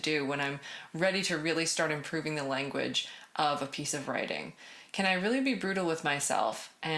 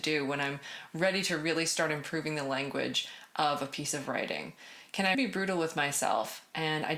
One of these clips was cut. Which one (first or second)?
second